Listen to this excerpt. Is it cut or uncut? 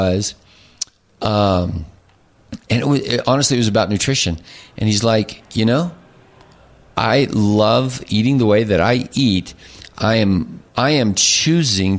cut